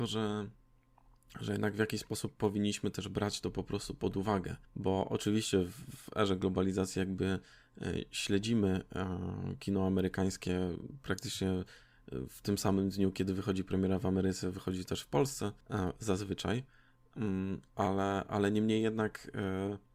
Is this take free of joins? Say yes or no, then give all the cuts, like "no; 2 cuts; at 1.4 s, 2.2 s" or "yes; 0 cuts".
no; 2 cuts; at 4.6 s, 15.6 s